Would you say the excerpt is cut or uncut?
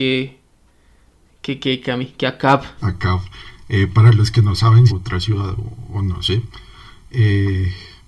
cut